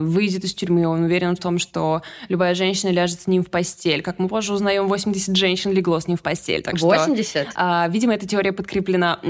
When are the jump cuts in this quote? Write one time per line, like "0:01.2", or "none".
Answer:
none